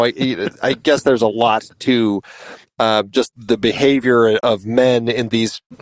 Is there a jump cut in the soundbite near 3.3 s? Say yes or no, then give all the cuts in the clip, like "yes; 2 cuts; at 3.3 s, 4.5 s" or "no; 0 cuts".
yes; 2 cuts; at 3.3 s, 4.4 s